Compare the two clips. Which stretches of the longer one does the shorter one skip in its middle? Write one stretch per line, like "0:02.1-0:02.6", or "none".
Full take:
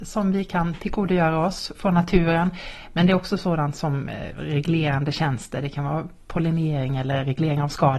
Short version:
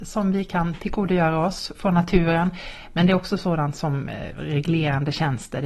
none